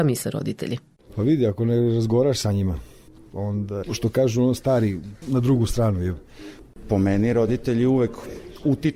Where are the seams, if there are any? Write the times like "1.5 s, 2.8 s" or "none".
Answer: 3.8 s, 5.2 s